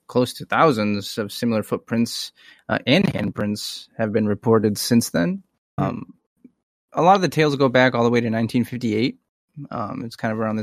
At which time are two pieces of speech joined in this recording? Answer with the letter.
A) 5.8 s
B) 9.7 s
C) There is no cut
A